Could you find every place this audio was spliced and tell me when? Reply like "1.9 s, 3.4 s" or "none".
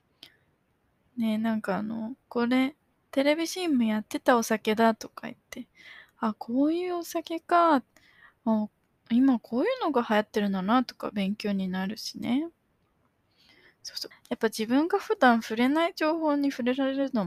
2.2 s, 14.1 s